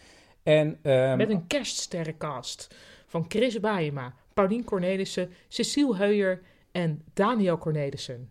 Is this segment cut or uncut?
uncut